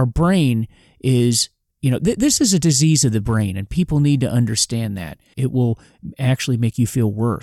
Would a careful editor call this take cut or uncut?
cut